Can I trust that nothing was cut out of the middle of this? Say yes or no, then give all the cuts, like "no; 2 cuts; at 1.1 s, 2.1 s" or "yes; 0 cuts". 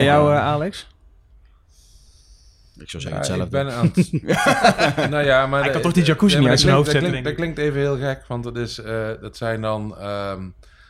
yes; 0 cuts